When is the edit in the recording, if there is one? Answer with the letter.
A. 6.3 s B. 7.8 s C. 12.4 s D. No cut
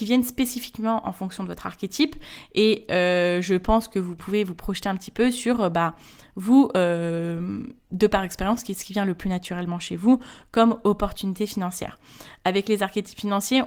B